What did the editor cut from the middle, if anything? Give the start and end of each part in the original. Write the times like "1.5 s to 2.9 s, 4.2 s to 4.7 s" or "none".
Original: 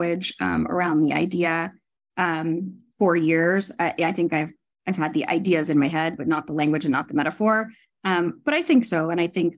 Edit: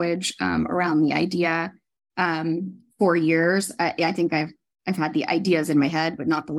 none